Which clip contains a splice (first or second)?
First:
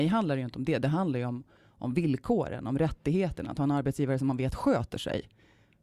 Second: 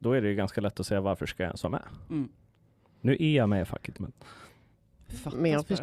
second